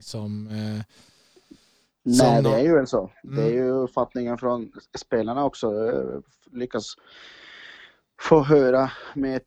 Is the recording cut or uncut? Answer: uncut